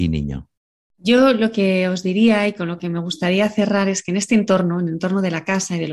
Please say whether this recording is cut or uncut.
uncut